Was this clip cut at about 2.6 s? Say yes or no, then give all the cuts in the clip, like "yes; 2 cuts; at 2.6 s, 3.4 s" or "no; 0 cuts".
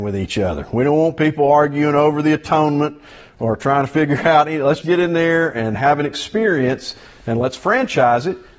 no; 1 cut; at 4.8 s